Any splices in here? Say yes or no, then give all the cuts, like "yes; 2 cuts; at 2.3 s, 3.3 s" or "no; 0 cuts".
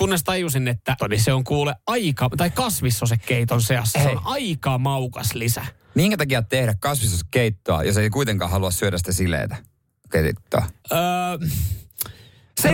yes; 2 cuts; at 1.0 s, 10.8 s